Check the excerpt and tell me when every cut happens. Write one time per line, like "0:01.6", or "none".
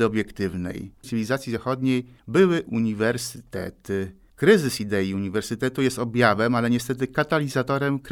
0:01.0